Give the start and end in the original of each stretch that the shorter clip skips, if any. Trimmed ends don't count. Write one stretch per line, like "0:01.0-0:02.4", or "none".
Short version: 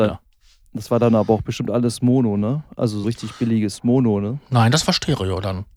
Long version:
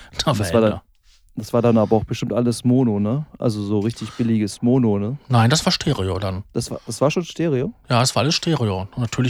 0:03.7-0:03.8